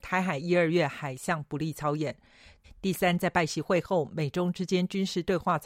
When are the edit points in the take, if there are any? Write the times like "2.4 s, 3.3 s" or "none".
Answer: 2.6 s